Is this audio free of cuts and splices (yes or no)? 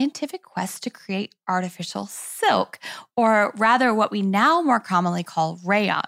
yes